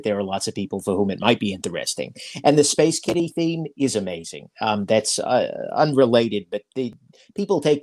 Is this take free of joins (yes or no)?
yes